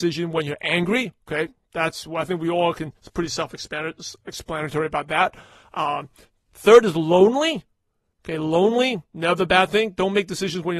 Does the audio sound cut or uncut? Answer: uncut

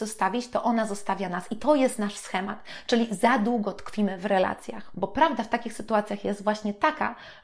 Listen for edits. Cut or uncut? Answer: uncut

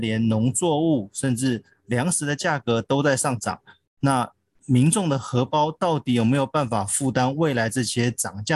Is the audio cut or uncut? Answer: uncut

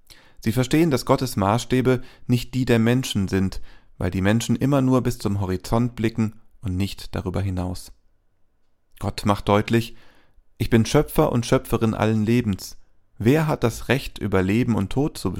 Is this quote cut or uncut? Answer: uncut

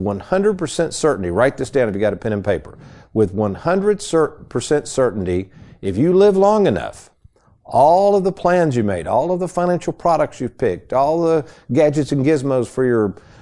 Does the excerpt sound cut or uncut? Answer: uncut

